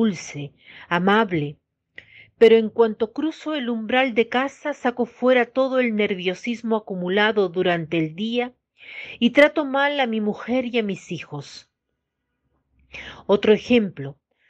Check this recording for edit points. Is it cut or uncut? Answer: uncut